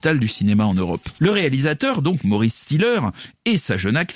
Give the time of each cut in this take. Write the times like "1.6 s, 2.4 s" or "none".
1.2 s